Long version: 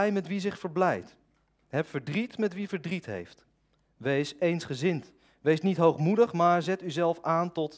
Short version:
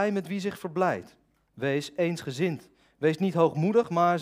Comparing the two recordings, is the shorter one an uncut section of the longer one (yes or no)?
no